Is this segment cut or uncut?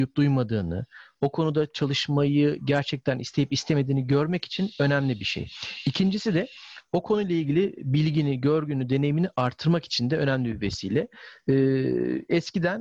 uncut